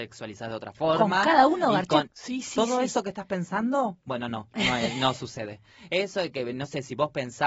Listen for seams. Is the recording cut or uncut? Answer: cut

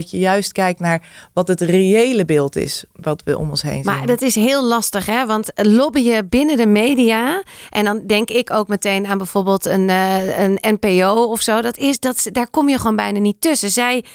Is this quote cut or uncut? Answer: cut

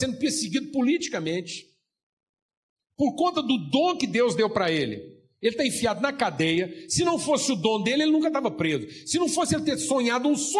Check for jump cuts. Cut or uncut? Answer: uncut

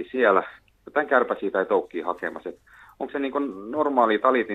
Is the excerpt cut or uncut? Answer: uncut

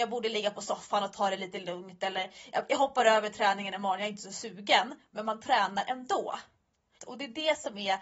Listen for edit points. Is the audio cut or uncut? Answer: cut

